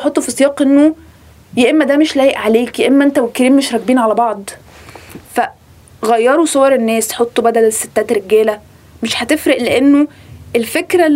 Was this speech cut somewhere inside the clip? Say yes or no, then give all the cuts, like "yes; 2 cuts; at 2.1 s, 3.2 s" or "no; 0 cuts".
no; 0 cuts